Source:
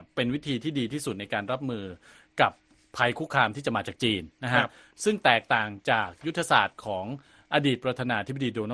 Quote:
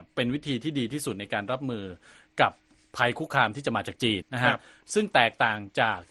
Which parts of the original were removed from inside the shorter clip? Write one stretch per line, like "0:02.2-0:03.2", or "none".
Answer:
0:04.2-0:04.3

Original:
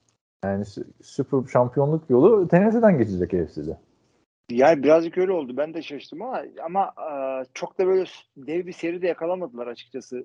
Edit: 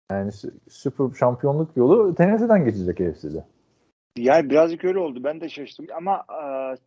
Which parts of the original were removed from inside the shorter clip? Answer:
0:06.2-0:06.5

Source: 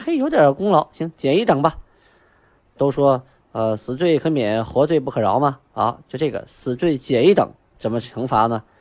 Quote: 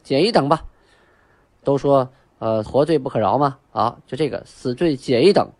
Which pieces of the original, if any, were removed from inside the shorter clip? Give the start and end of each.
0:03.8-0:04.7

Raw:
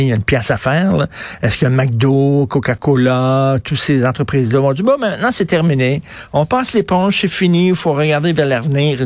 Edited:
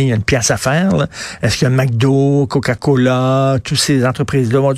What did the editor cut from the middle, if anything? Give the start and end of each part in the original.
none

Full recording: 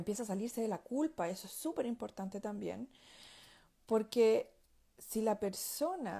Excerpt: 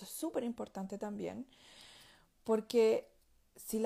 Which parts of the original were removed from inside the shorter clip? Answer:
none

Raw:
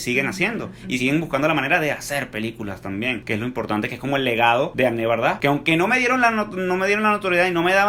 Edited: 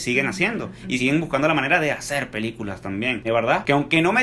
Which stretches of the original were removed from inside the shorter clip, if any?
0:03.2-0:05.0

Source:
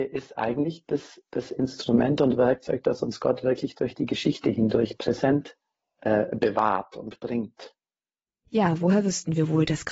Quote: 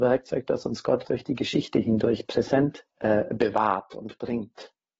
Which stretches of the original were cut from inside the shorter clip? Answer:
0:03.4-0:03.7
0:05.6-0:05.9

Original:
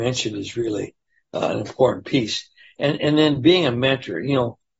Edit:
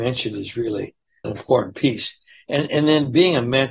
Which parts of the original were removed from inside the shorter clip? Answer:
0:01.2-0:01.5

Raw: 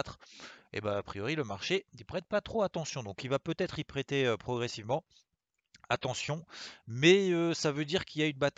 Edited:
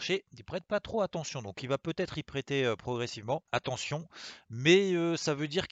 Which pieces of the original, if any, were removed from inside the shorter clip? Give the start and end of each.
0:05.1-0:05.9

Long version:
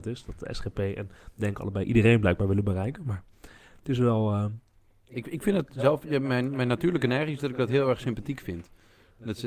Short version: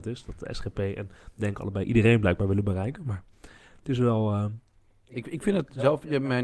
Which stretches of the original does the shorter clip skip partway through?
none

